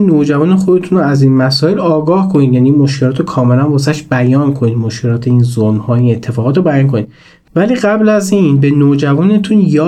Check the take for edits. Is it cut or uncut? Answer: uncut